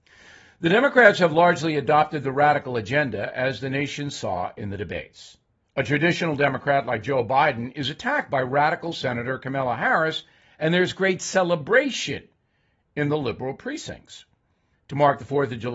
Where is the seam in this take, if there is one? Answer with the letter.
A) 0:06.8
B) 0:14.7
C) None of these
B